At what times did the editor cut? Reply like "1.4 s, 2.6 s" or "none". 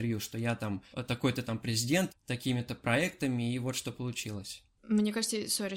0.9 s, 2.1 s